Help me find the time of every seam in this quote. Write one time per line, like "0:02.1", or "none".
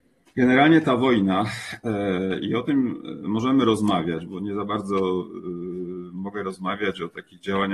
0:04.2